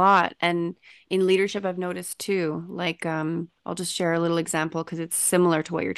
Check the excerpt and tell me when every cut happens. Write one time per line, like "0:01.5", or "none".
0:03.6